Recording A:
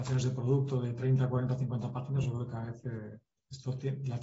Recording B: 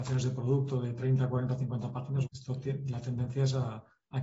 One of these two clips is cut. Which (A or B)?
B